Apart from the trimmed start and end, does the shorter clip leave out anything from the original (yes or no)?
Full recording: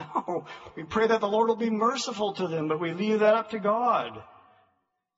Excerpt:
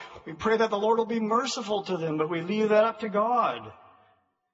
no